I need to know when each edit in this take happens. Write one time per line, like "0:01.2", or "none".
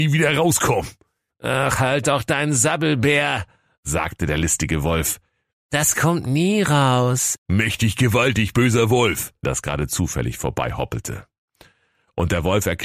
0:07.4
0:09.4